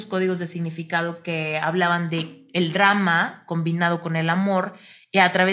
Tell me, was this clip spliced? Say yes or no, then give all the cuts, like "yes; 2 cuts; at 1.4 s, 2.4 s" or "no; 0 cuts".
no; 0 cuts